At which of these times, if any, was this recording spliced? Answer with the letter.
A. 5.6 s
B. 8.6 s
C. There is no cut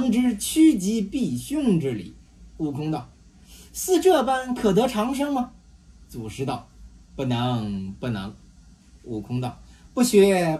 C